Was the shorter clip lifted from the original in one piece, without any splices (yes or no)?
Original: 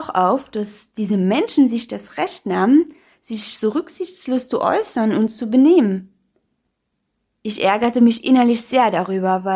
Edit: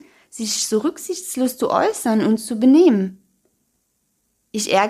yes